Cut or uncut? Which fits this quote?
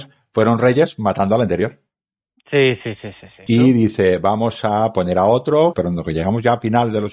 cut